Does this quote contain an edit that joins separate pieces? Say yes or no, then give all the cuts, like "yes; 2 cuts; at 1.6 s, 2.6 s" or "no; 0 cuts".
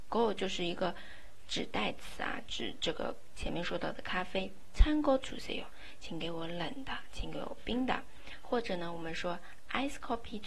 no; 0 cuts